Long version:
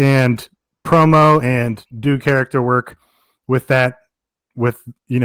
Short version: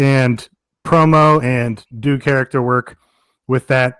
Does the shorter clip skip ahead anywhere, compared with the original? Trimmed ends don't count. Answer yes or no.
no